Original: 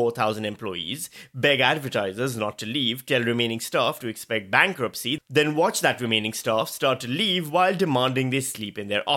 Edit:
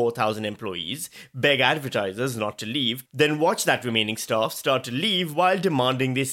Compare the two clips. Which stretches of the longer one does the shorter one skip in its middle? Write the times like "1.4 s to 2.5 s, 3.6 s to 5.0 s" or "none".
3.1 s to 5.2 s